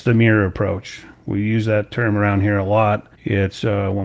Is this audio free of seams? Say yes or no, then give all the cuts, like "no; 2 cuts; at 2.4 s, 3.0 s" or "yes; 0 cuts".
no; 1 cut; at 3.1 s